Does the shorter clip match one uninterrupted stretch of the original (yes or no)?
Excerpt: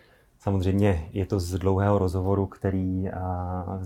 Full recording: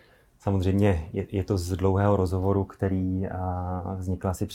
no